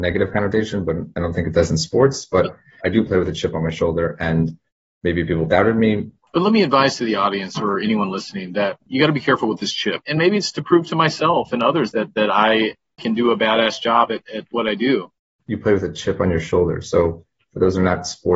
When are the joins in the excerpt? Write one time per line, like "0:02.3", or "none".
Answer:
0:02.8
0:06.2
0:10.0